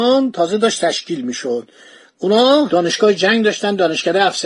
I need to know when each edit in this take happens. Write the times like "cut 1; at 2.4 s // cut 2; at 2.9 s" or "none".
none